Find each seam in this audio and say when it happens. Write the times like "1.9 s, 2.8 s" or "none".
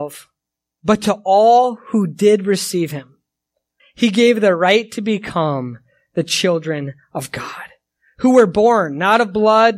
3.8 s